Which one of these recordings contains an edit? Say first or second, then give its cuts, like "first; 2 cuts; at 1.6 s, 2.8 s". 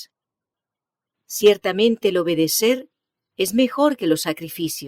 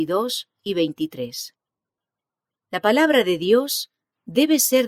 first; 1 cut; at 1.1 s